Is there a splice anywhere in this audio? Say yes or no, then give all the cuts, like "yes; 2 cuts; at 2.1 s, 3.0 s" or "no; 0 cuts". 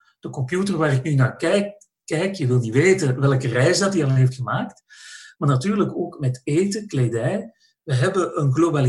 no; 0 cuts